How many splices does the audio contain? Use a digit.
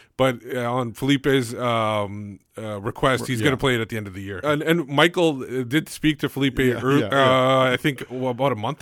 1